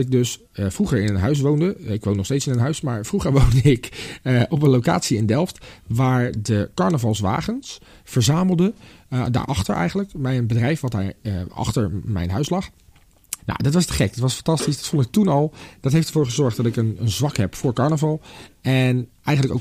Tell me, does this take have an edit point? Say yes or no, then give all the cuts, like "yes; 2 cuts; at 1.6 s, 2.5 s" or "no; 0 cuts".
yes; 1 cut; at 13.4 s